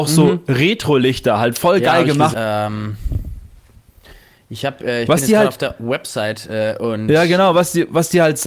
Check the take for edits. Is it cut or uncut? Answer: cut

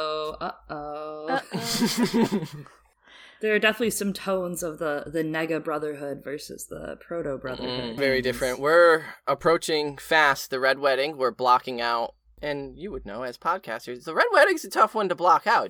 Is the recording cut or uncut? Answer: cut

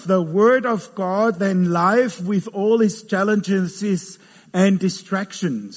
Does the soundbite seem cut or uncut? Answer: uncut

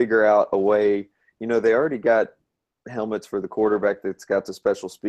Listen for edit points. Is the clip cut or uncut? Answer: uncut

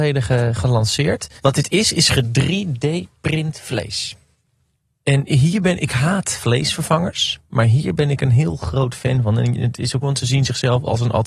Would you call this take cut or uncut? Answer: cut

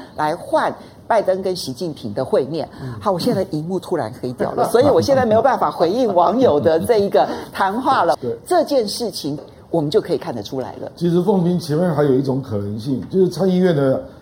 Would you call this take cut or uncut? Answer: cut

